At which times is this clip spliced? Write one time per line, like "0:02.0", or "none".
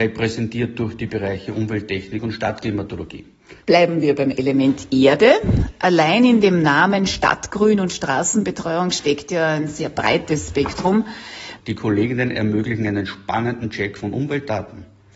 0:03.6
0:11.6